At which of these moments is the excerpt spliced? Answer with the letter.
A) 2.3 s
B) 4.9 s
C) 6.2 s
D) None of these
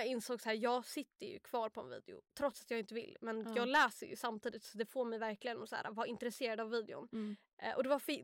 A